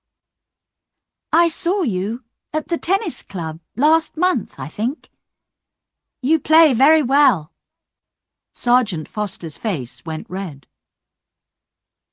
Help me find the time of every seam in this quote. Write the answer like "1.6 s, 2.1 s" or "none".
none